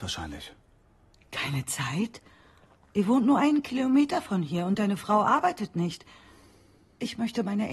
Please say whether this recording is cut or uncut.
uncut